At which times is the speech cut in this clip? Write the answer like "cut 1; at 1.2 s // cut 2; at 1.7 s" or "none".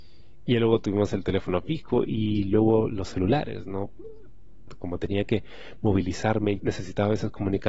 cut 1; at 4.7 s // cut 2; at 6.6 s